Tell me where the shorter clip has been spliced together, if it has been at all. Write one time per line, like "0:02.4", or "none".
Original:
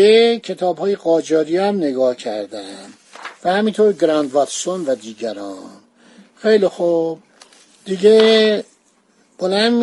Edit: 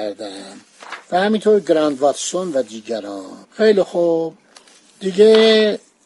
0:03.4